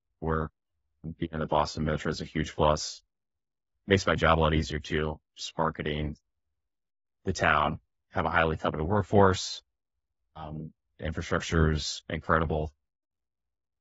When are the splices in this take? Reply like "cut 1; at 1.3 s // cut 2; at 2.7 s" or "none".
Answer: cut 1; at 7.9 s